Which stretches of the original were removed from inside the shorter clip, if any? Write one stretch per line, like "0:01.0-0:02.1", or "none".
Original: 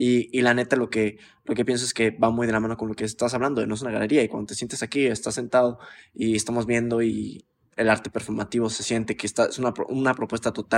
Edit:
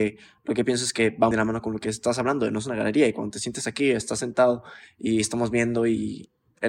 0:02.3-0:02.5